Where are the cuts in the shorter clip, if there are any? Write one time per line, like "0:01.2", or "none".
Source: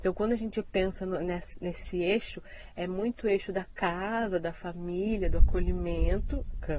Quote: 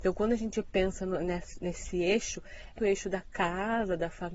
0:02.8